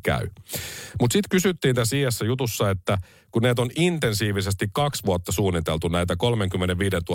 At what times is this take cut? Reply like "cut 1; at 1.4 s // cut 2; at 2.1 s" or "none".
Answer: cut 1; at 0.9 s